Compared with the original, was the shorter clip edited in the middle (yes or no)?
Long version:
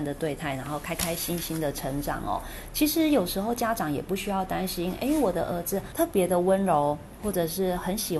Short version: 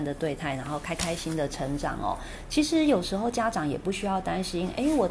yes